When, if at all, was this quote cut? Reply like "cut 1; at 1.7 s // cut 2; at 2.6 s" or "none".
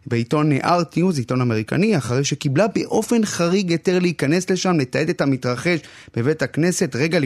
none